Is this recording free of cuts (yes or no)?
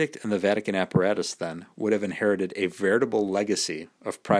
yes